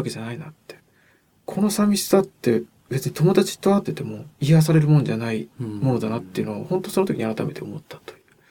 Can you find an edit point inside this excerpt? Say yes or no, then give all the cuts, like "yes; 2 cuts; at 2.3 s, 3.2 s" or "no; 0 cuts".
yes; 1 cut; at 3.9 s